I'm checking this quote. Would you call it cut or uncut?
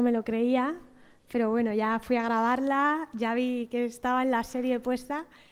uncut